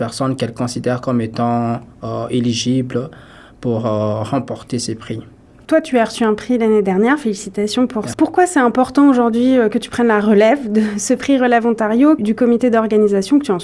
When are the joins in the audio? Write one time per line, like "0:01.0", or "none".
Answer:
0:08.1
0:12.2